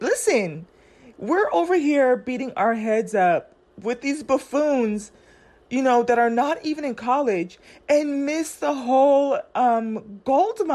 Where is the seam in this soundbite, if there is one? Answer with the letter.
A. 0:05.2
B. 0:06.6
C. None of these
C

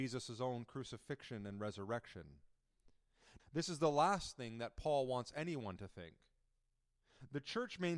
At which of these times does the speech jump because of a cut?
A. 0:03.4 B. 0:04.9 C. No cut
A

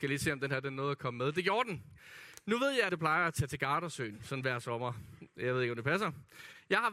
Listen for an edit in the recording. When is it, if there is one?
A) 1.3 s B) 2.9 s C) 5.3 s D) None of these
B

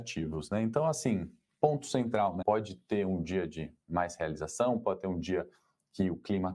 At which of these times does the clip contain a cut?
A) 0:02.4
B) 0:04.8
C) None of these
A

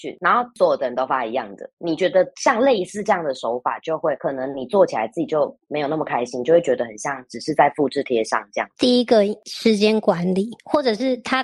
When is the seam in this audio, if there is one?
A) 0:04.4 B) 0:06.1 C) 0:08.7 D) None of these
C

